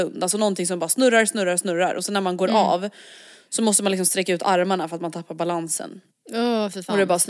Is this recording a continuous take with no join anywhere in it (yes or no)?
yes